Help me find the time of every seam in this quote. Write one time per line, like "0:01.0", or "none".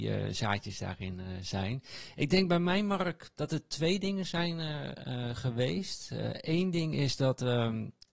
none